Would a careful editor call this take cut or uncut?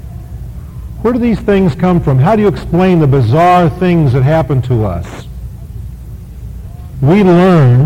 cut